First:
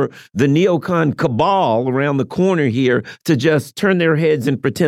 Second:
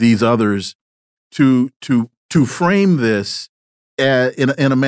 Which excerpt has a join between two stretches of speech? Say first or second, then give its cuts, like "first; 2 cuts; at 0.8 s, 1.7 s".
second; 1 cut; at 2.2 s